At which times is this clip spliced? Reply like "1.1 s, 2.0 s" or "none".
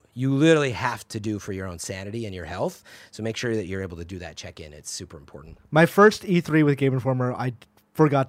none